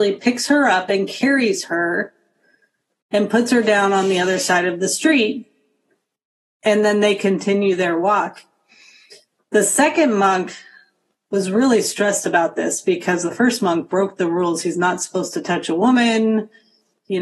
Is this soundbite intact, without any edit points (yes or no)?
yes